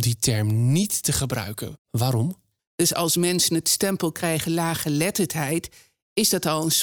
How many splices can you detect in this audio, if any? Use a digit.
1